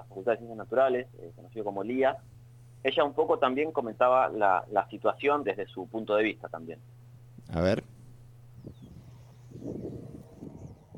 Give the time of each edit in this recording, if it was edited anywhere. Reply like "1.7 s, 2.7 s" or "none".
5.4 s